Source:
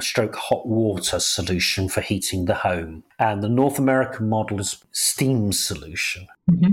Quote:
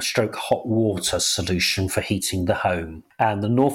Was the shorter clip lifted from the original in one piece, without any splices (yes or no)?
yes